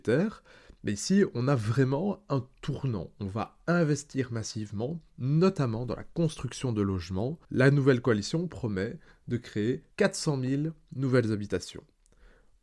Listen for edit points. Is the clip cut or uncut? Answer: cut